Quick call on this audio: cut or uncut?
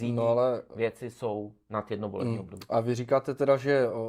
uncut